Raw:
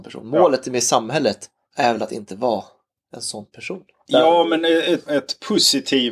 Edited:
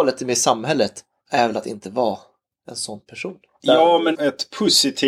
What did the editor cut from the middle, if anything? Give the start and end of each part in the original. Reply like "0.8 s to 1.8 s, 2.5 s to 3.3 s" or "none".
4.6 s to 5.0 s